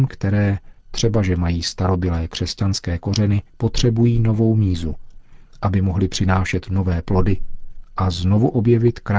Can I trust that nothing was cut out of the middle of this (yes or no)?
no